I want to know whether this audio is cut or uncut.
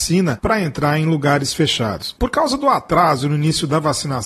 cut